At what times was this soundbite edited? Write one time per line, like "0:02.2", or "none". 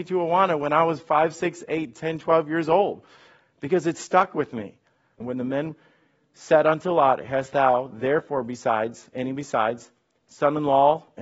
0:05.2

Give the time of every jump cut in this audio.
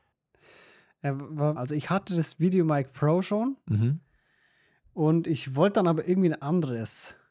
0:01.6

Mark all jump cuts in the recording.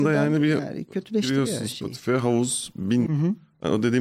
0:03.1

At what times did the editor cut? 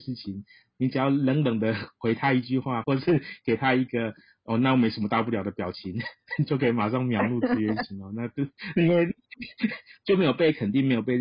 0:02.8

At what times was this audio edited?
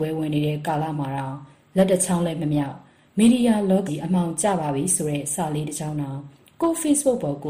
0:03.9

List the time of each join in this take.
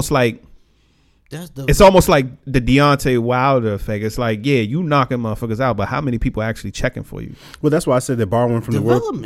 none

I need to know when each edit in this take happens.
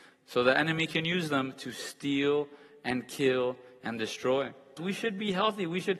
0:04.8

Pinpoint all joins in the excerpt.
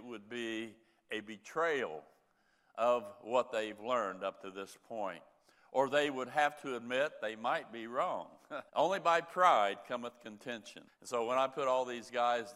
0:08.7
0:10.9

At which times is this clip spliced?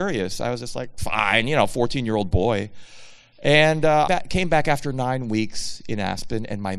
0:04.1

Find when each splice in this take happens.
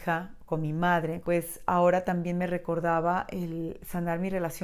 0:01.2

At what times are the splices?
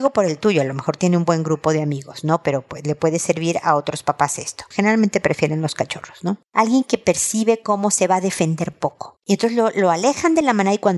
0:04.7

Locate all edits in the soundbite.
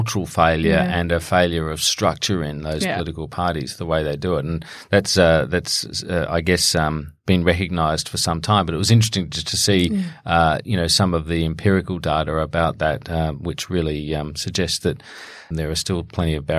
0:15.5

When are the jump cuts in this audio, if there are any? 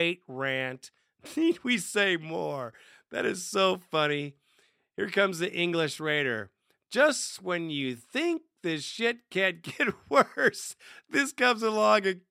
none

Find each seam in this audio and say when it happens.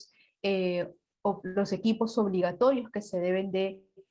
0:01.4

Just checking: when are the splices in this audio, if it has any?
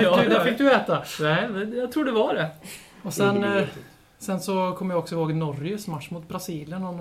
none

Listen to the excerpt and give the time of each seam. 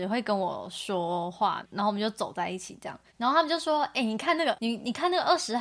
none

